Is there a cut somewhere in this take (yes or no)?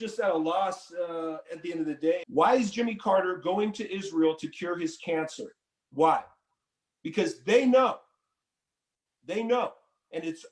yes